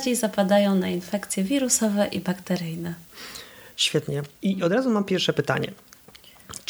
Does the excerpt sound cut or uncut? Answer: cut